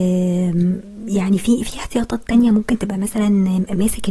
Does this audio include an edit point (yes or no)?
no